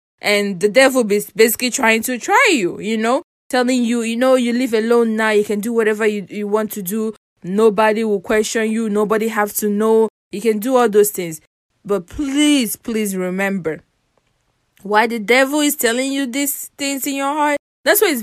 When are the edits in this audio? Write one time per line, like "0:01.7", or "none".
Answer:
none